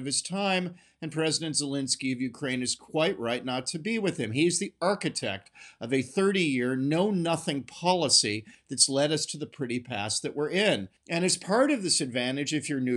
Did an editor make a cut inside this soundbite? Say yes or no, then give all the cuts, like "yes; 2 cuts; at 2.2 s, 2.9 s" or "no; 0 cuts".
yes; 1 cut; at 11.0 s